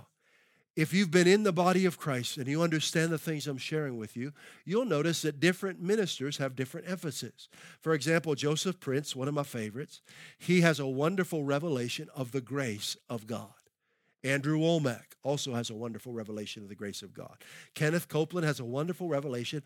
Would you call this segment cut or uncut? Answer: uncut